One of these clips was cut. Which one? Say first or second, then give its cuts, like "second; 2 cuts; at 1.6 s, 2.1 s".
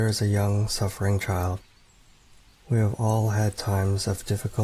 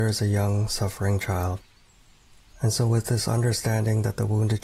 second; 1 cut; at 2.5 s